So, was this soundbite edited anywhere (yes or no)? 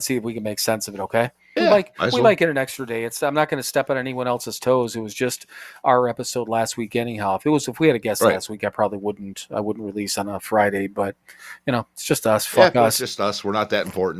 yes